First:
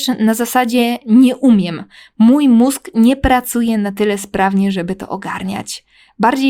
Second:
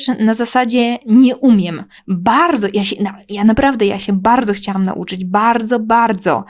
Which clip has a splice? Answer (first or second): second